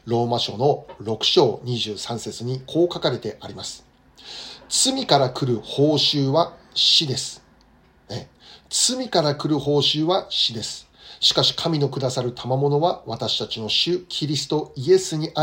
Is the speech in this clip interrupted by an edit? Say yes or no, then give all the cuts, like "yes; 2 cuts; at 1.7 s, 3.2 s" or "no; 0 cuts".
no; 0 cuts